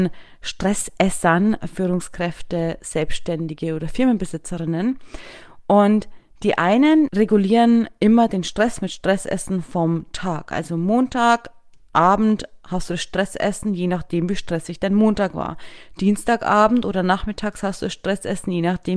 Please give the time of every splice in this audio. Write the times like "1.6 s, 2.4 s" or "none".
none